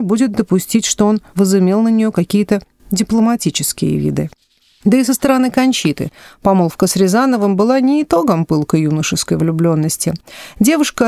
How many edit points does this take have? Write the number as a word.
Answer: one